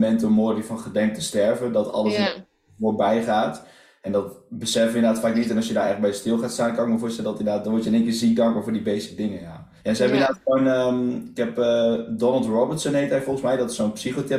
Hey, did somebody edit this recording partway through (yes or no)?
yes